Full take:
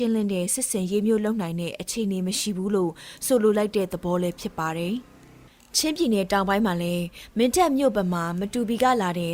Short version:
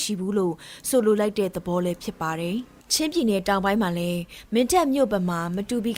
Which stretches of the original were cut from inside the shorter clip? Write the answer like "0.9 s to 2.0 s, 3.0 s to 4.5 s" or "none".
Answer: 5.2 s to 5.6 s